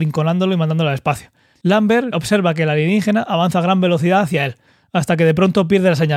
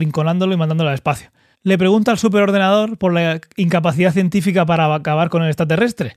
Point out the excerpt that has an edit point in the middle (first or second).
first